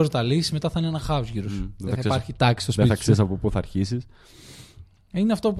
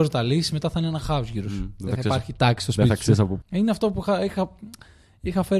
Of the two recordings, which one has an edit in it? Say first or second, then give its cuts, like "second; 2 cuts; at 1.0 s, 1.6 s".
second; 1 cut; at 3.4 s